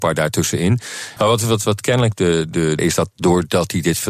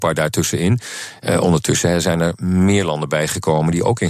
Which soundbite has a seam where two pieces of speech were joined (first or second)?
first